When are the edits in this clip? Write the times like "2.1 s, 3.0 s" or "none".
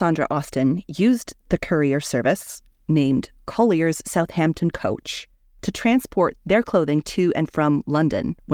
none